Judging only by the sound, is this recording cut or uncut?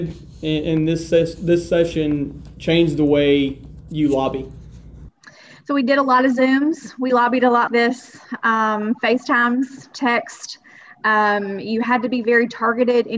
cut